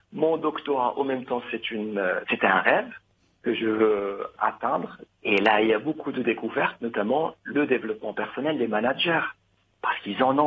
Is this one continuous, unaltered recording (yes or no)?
no